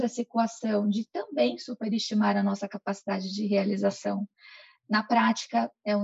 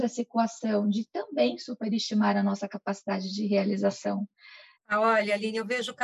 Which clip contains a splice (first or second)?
second